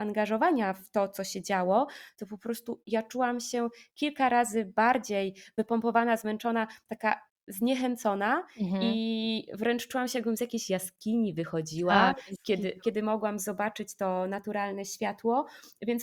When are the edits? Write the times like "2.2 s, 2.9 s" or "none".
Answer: none